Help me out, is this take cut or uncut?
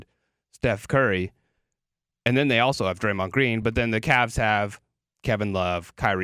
uncut